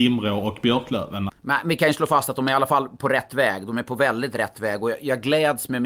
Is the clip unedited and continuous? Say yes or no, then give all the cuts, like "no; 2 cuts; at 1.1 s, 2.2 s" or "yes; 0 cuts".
no; 1 cut; at 1.3 s